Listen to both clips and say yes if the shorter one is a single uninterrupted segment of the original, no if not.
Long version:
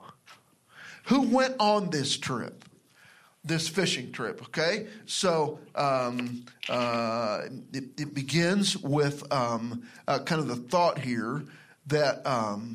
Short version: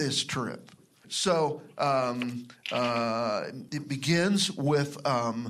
no